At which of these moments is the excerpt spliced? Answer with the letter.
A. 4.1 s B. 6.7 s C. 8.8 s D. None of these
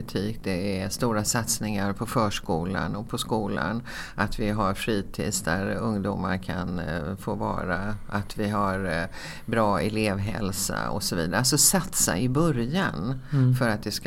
D